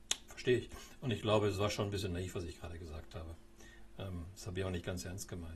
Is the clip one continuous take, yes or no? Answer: yes